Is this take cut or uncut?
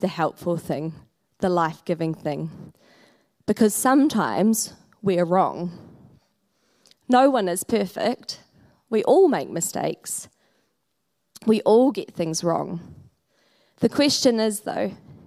uncut